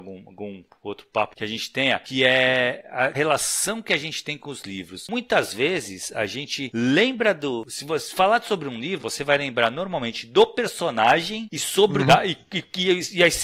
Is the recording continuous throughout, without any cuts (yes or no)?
no